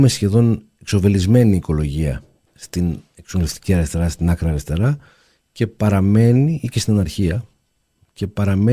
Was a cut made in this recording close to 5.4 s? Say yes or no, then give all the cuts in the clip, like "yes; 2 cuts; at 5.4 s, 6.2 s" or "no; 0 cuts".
no; 0 cuts